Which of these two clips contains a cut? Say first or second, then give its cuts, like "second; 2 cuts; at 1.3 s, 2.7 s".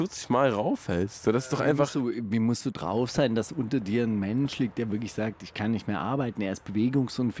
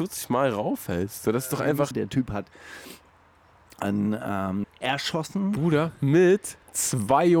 second; 2 cuts; at 1.9 s, 4.6 s